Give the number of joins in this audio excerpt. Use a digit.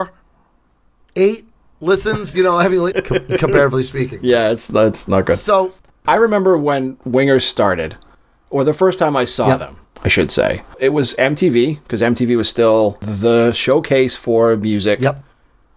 1